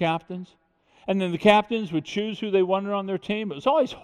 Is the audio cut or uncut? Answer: uncut